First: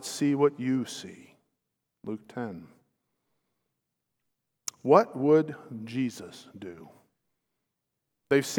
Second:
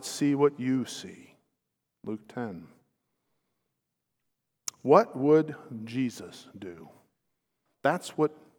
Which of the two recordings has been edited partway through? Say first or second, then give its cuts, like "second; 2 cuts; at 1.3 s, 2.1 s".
second; 1 cut; at 7.7 s